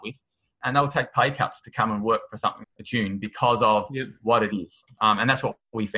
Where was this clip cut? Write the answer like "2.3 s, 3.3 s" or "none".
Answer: 2.6 s